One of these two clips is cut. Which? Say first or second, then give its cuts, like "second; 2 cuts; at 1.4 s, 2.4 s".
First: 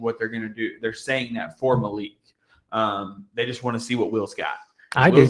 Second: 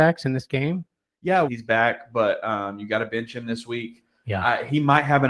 second; 1 cut; at 1.4 s